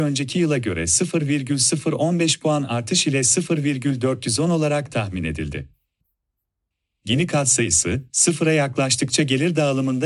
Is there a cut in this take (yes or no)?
no